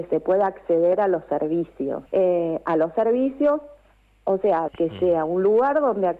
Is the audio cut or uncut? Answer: cut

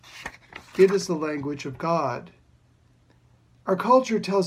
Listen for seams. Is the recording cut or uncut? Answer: uncut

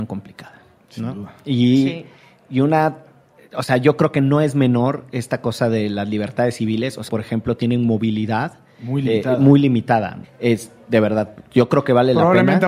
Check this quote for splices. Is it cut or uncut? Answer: cut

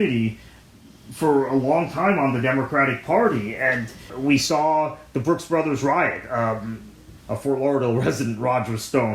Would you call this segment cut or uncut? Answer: cut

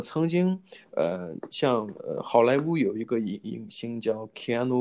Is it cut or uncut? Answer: uncut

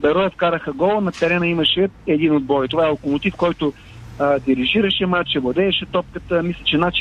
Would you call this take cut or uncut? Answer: uncut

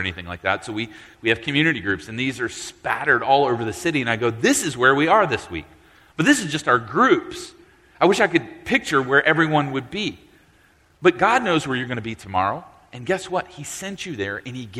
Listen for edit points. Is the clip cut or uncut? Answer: uncut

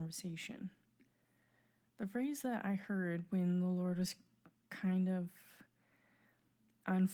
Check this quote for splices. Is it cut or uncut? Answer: uncut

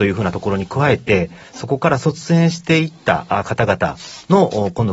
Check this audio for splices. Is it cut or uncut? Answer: uncut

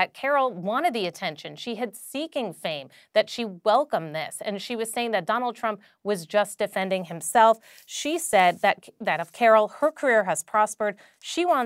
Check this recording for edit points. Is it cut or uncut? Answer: uncut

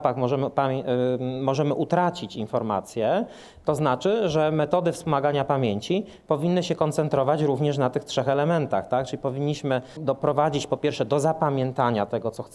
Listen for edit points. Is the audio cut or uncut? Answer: uncut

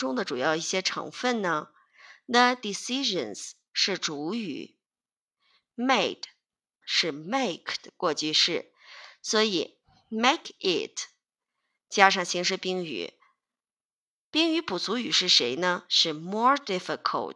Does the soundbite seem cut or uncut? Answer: cut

